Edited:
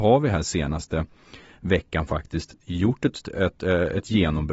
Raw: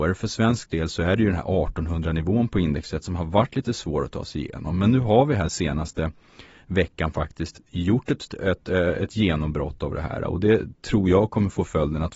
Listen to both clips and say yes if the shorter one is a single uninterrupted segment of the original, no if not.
yes